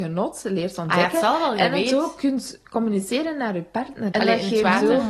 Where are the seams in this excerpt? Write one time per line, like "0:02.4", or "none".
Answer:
0:04.1